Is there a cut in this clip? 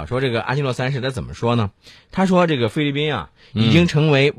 no; 0 cuts

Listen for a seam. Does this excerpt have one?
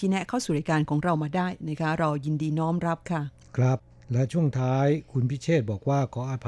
no; 0 cuts

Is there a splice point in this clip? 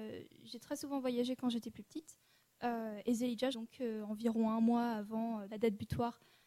yes; 2 cuts; at 3.5 s, 5.5 s

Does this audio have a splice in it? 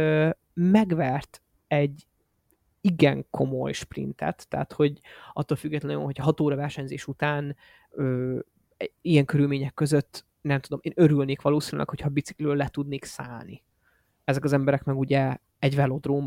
no; 0 cuts

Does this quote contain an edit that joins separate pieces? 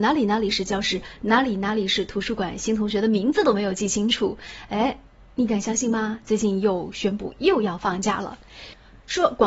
no; 0 cuts

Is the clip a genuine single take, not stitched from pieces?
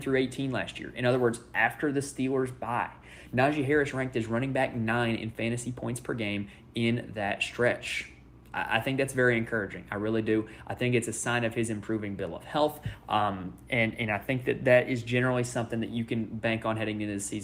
yes; 0 cuts

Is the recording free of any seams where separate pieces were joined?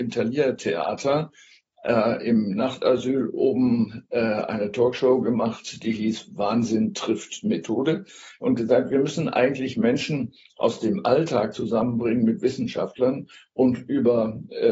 yes; 0 cuts

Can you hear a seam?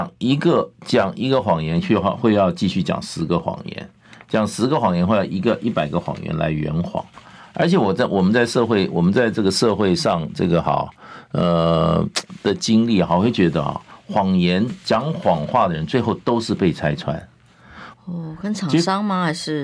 yes; 1 cut; at 17.9 s

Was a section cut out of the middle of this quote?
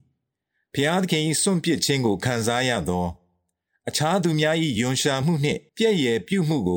yes; 1 cut; at 5.7 s

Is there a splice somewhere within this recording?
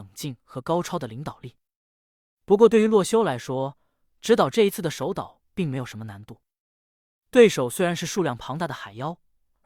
no; 0 cuts

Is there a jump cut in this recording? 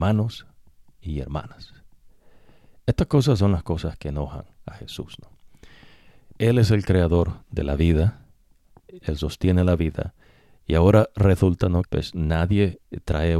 yes; 3 cuts; at 6.3 s, 9.0 s, 11.8 s

